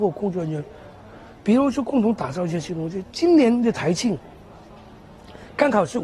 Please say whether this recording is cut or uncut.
uncut